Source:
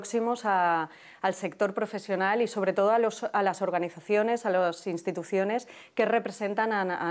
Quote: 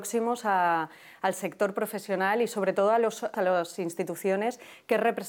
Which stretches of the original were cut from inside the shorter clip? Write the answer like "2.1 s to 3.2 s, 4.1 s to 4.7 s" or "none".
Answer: 3.3 s to 4.4 s